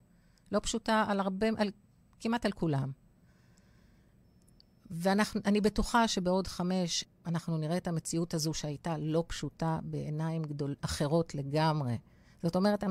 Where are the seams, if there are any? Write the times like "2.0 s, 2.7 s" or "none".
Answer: 7.0 s